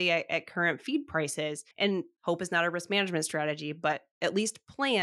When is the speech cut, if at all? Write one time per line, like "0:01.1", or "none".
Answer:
0:01.7

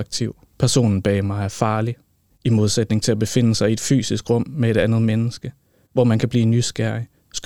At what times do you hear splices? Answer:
0:02.3

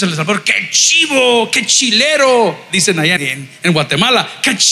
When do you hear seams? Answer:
0:03.2

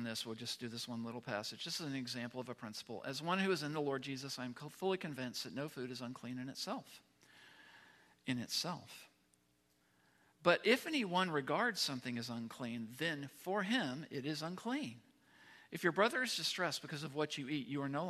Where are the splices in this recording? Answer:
none

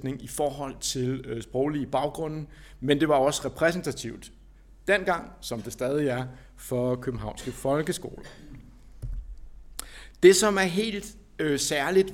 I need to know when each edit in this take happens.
none

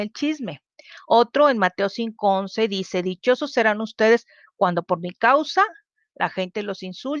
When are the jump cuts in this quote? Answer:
none

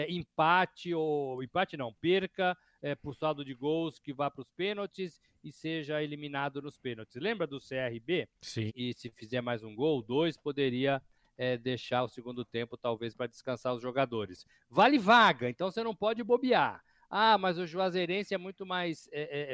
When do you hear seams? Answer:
0:08.7

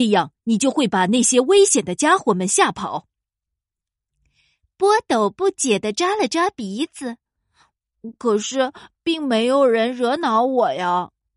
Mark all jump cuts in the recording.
none

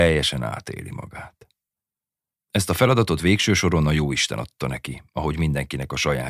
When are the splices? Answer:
0:02.3

